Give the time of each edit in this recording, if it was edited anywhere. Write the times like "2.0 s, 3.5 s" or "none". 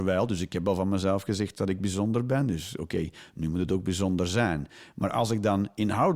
none